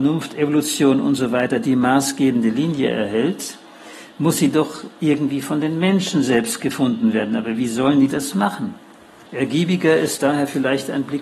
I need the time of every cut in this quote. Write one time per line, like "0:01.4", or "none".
0:09.3